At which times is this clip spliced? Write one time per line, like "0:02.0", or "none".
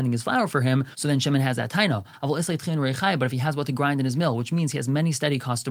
none